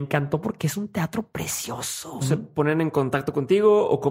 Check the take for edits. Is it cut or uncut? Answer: cut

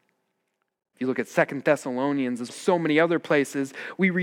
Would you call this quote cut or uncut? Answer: cut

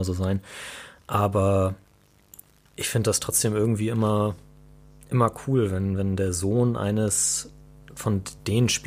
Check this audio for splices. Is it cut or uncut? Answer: uncut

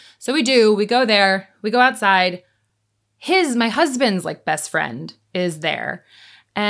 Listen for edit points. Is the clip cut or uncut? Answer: uncut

